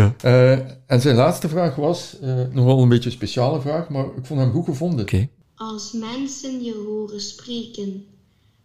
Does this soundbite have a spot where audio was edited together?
yes; 1 cut; at 5.1 s

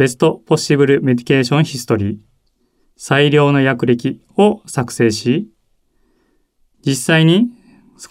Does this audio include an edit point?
no; 0 cuts

